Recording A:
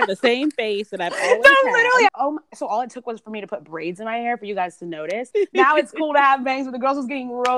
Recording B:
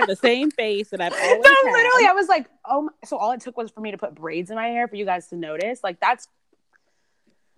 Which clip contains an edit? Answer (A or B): A